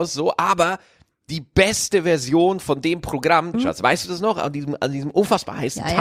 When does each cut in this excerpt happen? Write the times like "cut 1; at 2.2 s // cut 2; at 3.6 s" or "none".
cut 1; at 3.5 s